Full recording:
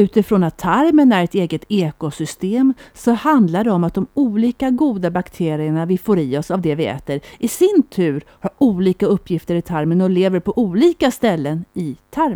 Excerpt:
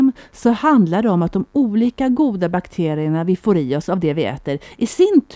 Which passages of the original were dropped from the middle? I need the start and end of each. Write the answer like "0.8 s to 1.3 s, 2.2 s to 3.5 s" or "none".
none